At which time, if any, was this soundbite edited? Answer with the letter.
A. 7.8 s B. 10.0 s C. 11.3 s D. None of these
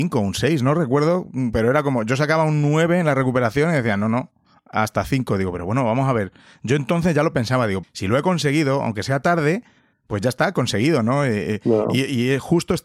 A